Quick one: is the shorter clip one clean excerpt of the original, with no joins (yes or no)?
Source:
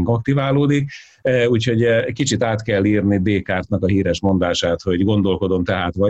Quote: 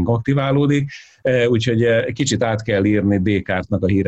yes